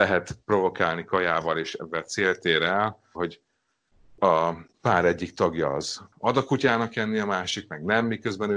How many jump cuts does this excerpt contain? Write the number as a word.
one